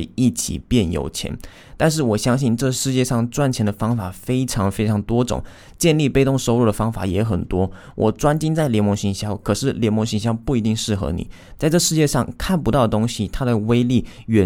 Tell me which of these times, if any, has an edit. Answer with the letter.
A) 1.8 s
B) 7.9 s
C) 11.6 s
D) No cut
C